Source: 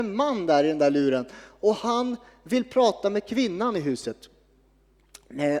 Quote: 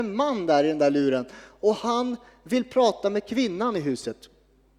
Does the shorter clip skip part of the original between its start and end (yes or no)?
no